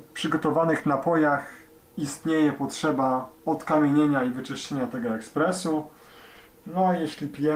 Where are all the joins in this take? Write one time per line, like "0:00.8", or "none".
none